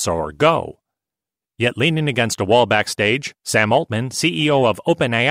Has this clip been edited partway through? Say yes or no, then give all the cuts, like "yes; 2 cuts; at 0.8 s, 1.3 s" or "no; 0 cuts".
yes; 1 cut; at 3.4 s